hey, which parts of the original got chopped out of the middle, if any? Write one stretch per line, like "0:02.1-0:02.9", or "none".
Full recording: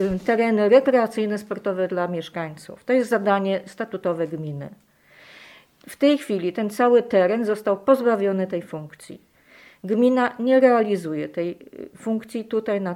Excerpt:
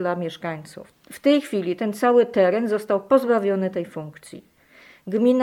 0:02.8-0:05.7